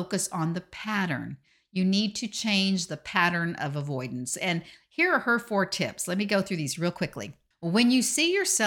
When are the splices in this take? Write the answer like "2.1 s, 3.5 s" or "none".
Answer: none